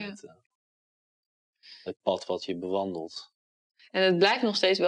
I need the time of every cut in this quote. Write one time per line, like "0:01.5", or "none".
none